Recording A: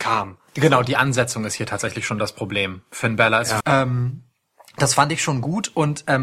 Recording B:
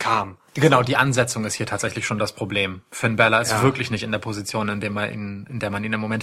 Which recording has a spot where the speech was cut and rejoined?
A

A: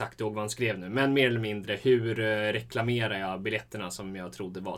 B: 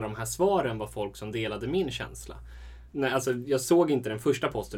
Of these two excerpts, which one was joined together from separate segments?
B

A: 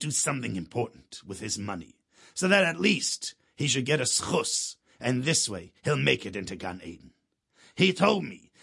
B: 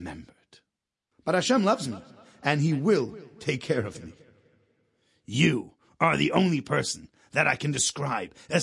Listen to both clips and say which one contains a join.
A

